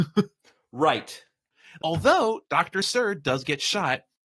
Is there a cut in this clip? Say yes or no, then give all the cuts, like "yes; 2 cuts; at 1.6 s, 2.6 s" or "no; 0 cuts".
yes; 1 cut; at 1.8 s